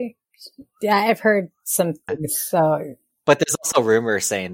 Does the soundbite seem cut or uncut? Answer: cut